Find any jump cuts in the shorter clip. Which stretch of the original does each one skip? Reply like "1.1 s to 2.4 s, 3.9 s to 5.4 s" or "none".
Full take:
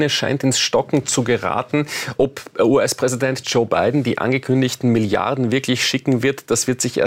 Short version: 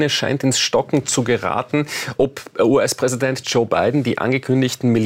none